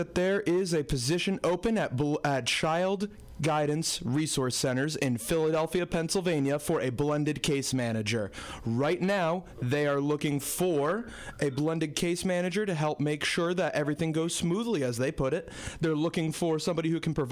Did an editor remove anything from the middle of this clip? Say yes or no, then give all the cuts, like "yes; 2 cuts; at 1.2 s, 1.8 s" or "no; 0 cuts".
no; 0 cuts